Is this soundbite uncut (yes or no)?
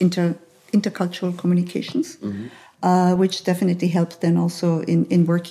yes